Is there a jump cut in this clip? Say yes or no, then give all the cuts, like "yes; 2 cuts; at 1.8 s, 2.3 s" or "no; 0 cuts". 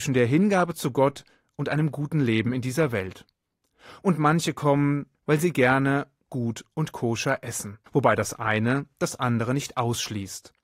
yes; 3 cuts; at 4.0 s, 5.1 s, 7.9 s